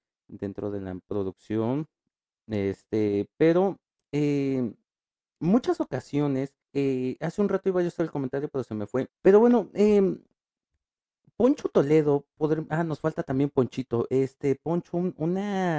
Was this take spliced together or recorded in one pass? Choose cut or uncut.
cut